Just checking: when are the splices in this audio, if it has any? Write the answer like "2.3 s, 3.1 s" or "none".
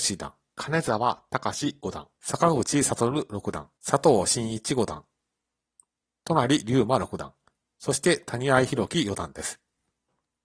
none